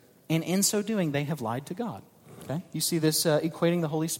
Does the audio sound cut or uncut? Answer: uncut